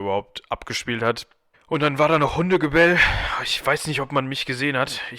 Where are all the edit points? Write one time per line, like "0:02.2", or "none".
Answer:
0:01.5